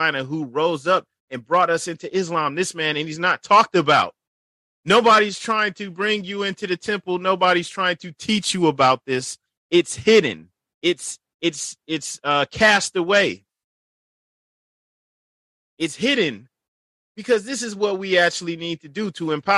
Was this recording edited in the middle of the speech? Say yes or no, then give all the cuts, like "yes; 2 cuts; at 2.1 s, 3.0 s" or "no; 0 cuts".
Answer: no; 0 cuts